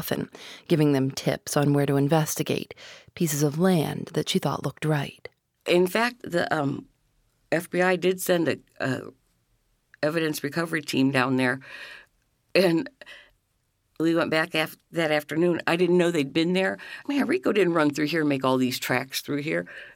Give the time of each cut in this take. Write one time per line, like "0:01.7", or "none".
0:17.0

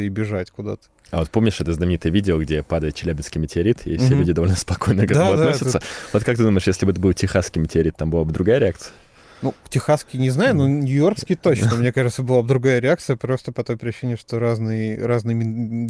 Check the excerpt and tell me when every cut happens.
none

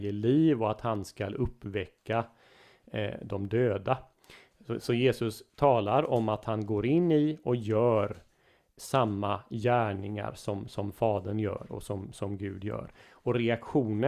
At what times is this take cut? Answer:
none

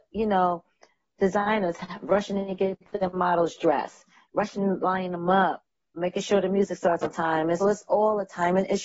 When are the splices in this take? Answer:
0:06.0
0:07.6

